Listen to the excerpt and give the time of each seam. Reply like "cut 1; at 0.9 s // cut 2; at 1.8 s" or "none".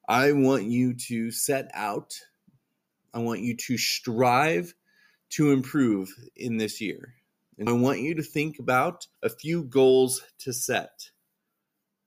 cut 1; at 7.7 s // cut 2; at 9.2 s

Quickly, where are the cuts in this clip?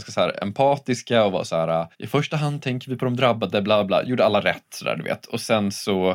cut 1; at 1.9 s

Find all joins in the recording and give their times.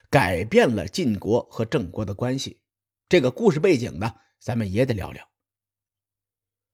none

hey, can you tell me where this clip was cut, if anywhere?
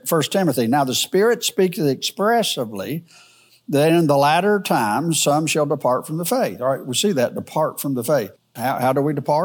cut 1; at 8.6 s

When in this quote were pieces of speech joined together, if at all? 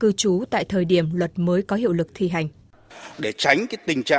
none

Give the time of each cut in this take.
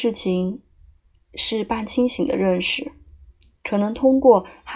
cut 1; at 3.5 s

